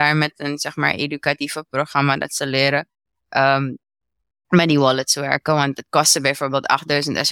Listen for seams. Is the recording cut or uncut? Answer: uncut